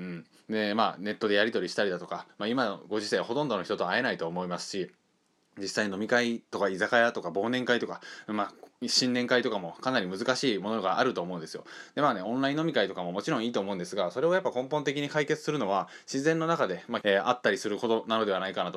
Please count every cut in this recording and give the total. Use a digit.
1